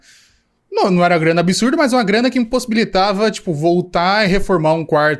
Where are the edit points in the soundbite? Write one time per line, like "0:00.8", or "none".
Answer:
none